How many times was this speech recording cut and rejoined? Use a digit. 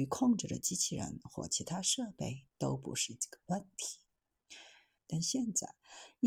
1